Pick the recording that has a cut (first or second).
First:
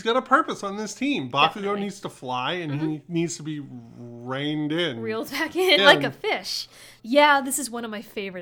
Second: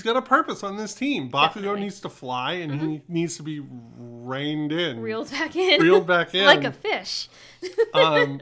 first